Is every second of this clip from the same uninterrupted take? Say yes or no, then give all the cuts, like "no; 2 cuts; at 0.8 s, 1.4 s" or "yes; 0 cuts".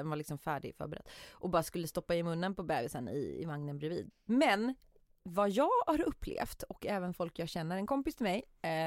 no; 1 cut; at 4.1 s